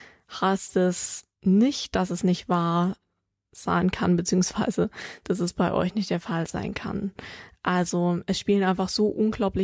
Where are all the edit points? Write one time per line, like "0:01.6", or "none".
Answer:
none